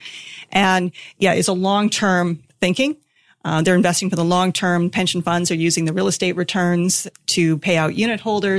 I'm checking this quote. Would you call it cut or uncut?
uncut